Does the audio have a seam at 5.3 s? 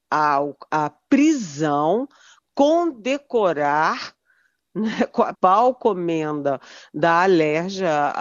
yes; 1 cut; at 5.3 s

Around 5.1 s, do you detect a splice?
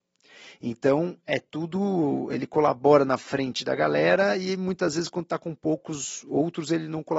no; 0 cuts

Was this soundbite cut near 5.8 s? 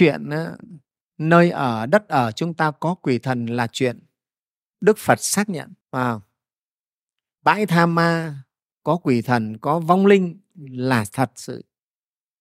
yes; 1 cut; at 5.8 s

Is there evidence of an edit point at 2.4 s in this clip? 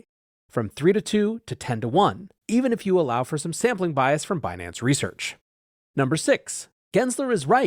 yes; 1 cut; at 2.4 s

